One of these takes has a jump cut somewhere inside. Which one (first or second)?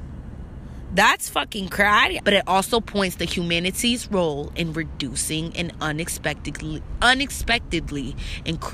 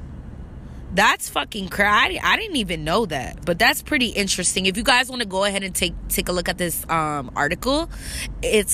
first